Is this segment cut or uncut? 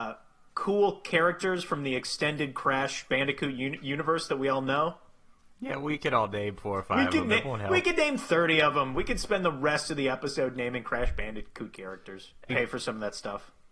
cut